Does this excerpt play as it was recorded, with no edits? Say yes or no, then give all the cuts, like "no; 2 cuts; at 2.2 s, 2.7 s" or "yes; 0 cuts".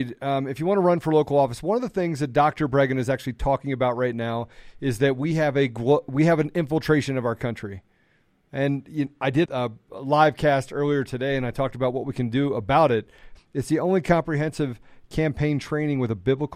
no; 2 cuts; at 9.4 s, 13.3 s